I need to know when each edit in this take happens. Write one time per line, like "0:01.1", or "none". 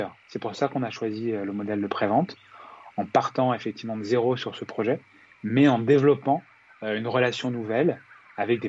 none